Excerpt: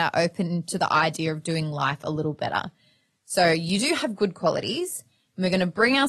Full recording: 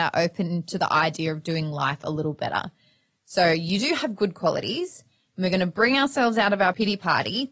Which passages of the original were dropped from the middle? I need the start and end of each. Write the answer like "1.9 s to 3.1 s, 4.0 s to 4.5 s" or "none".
none